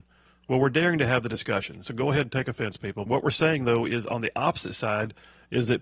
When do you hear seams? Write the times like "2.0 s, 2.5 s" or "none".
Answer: 3.1 s